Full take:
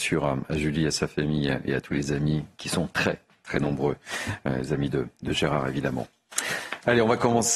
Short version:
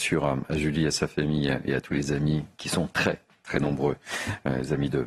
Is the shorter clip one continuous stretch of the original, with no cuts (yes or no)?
yes